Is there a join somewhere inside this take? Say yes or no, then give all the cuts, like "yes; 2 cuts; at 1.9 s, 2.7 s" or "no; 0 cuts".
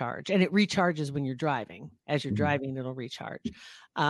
no; 0 cuts